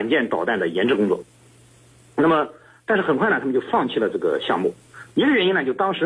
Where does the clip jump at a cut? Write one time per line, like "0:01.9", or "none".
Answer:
0:05.1